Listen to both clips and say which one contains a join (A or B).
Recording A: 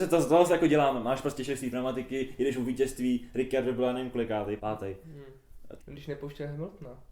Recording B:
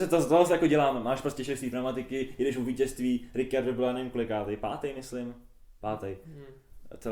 A